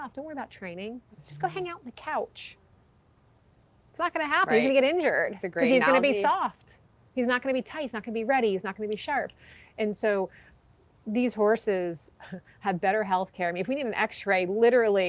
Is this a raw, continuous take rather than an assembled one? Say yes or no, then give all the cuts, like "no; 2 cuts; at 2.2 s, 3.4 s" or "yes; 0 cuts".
yes; 0 cuts